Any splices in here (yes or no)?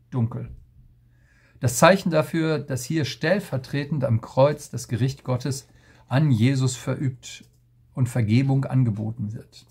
no